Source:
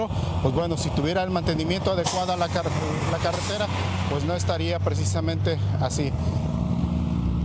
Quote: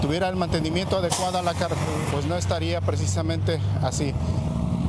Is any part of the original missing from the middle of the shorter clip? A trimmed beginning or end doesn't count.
yes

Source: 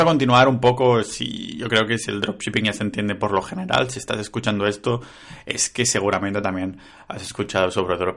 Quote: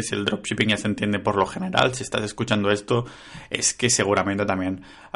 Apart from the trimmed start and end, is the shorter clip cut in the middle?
no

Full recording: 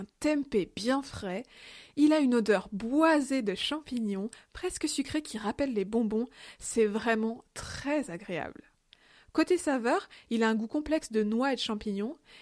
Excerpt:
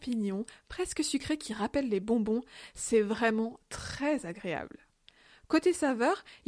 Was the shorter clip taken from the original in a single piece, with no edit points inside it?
yes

